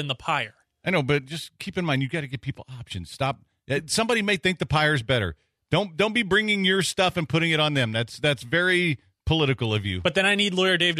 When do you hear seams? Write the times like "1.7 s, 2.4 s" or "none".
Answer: none